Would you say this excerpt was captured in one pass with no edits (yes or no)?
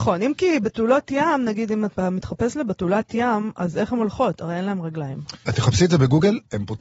no